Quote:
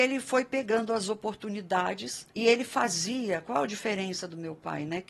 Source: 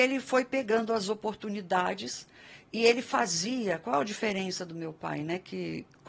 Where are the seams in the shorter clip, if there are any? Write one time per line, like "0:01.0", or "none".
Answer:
0:02.3